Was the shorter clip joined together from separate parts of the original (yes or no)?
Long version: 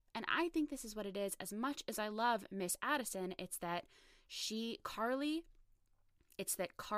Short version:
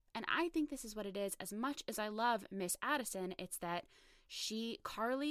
no